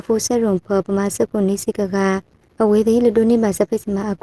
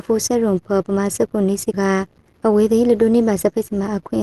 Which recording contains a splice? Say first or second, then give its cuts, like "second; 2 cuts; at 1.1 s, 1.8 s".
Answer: second; 1 cut; at 1.7 s